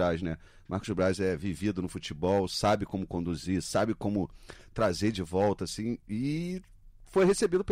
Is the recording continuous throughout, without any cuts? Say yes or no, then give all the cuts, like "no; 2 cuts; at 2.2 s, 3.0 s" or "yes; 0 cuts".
yes; 0 cuts